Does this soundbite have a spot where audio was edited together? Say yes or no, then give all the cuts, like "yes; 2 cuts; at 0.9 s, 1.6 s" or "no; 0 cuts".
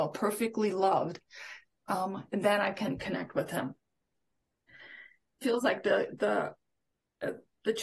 yes; 1 cut; at 5.4 s